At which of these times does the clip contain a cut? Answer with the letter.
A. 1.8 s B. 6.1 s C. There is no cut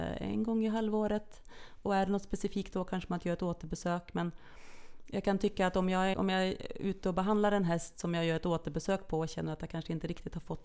B